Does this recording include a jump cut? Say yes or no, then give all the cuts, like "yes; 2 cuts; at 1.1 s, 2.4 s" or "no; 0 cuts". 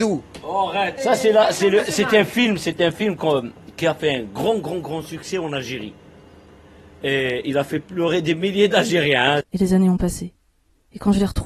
yes; 2 cuts; at 1.0 s, 9.4 s